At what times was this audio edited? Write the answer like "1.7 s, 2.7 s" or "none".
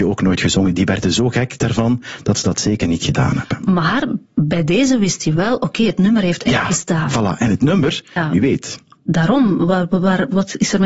8.2 s